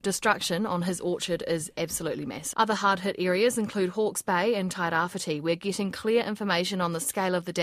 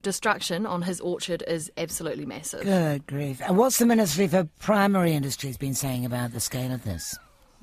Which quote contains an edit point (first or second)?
first